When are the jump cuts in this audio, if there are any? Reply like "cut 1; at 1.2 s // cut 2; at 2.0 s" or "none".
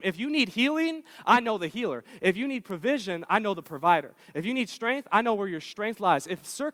none